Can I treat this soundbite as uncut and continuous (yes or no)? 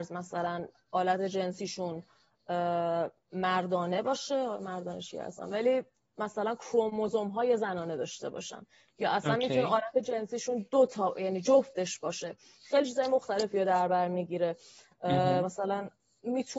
yes